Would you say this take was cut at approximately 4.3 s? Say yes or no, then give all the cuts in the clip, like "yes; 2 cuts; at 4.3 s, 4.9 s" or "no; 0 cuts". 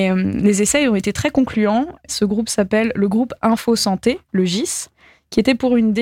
no; 1 cut; at 2.1 s